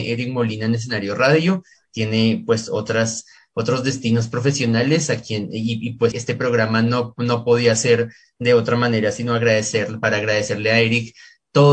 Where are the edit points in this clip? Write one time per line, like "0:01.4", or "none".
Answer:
0:06.1